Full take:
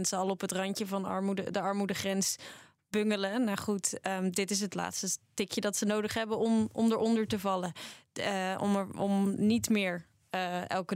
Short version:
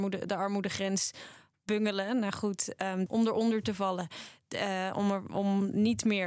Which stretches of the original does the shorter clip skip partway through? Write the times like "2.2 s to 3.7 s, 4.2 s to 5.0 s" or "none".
4.3 s to 6.7 s